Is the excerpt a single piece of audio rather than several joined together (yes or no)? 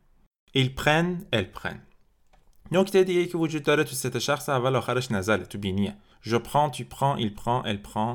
yes